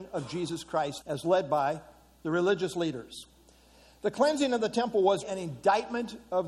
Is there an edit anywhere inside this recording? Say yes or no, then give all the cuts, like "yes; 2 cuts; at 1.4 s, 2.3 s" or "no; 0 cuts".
yes; 2 cuts; at 1.0 s, 5.2 s